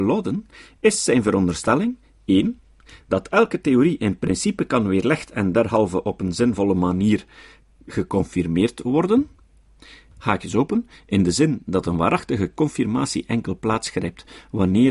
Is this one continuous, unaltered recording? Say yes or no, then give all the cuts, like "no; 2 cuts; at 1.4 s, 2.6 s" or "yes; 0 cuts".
yes; 0 cuts